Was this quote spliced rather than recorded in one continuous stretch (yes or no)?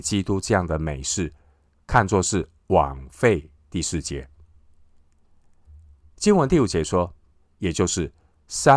yes